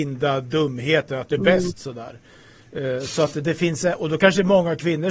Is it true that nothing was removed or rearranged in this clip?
no; 1 cut; at 1.4 s

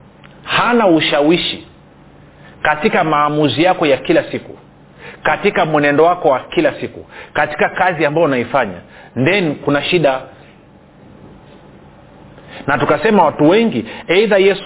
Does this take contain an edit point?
no; 0 cuts

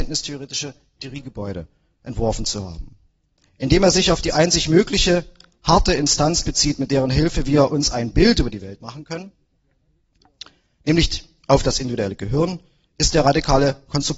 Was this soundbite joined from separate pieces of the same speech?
no; 0 cuts

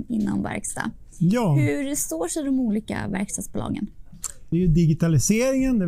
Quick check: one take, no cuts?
no; 1 cut; at 4.5 s

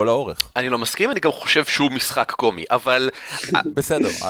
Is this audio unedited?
yes; 0 cuts

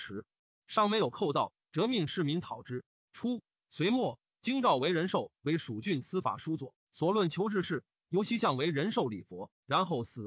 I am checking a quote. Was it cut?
yes; 1 cut; at 2.9 s

